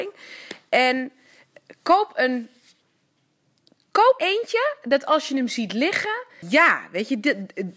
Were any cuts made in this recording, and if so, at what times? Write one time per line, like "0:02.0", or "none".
0:04.2
0:06.4